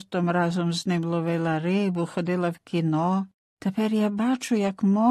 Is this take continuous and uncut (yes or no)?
yes